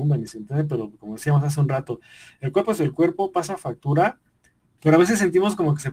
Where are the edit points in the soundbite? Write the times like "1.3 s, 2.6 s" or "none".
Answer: 4.8 s